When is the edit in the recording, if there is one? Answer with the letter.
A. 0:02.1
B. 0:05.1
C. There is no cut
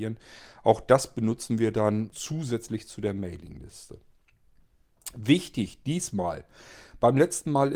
A